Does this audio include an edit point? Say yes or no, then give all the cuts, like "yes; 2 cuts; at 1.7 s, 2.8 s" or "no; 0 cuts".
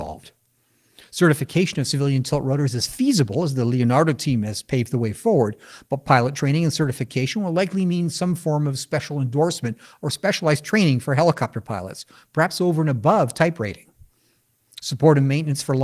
no; 0 cuts